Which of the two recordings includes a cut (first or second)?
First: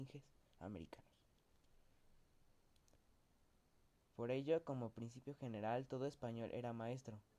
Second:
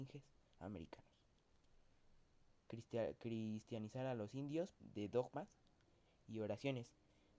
second